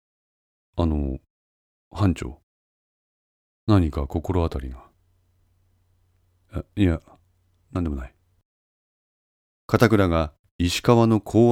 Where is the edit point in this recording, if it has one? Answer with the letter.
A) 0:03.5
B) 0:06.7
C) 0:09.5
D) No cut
A